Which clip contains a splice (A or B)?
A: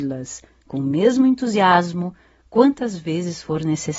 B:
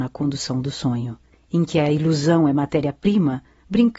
B